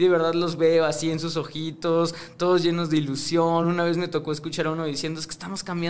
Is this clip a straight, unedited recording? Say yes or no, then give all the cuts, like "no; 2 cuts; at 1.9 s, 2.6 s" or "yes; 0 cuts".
yes; 0 cuts